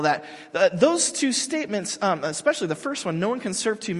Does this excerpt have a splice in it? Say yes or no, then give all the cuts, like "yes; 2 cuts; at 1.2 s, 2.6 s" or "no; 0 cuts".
no; 0 cuts